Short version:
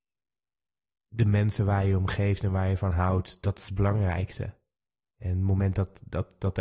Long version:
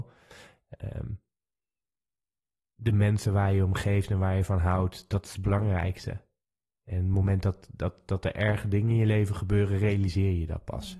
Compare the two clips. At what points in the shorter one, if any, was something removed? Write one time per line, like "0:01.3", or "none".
none